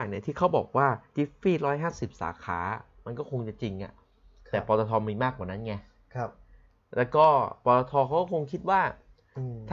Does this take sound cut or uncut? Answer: uncut